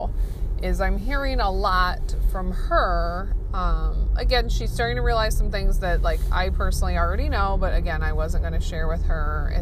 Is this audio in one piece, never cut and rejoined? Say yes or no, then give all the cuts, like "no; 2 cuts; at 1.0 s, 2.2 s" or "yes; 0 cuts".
yes; 0 cuts